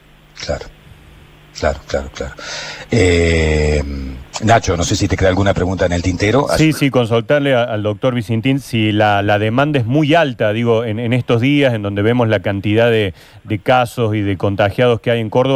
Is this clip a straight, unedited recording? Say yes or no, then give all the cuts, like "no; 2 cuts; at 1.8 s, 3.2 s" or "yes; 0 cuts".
no; 1 cut; at 6.6 s